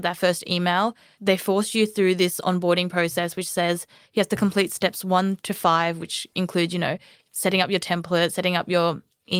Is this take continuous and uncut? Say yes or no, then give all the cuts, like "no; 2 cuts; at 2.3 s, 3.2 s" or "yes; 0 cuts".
yes; 0 cuts